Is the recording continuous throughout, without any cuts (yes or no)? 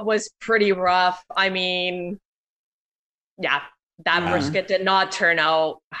yes